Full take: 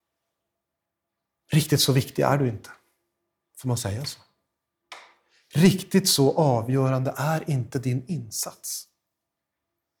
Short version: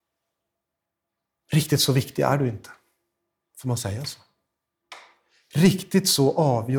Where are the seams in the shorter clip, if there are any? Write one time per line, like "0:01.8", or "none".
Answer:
none